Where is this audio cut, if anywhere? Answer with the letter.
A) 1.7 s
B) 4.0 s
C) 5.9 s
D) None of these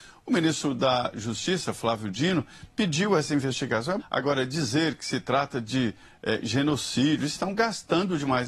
B